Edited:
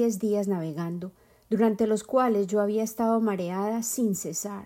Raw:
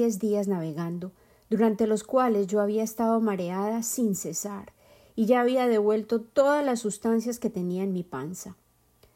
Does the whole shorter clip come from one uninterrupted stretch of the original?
yes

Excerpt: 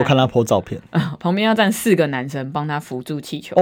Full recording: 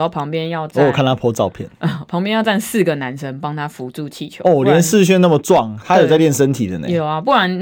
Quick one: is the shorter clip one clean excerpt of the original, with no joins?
yes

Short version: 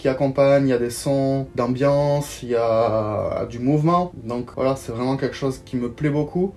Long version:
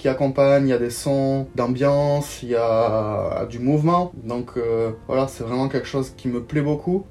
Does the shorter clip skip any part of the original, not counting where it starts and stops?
yes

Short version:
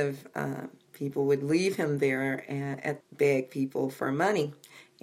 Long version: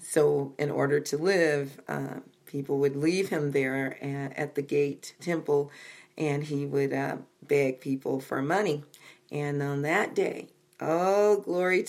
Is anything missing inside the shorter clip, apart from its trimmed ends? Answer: yes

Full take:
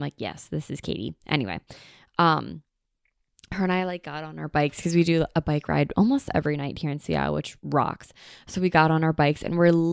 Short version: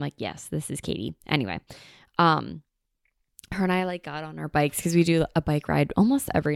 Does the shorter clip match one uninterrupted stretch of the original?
yes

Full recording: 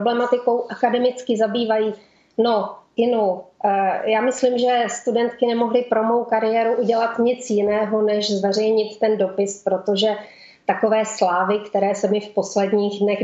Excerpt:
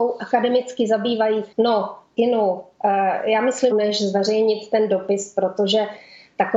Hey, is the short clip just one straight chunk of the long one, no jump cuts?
no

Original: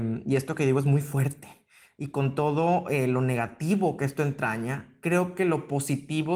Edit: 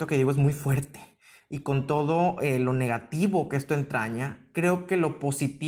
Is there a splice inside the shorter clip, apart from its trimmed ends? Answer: no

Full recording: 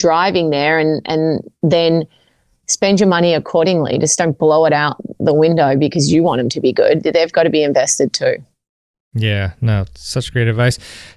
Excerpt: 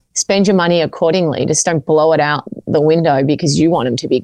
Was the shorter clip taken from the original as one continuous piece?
yes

